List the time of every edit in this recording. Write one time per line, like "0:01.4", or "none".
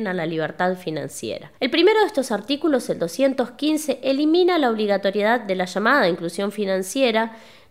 0:01.6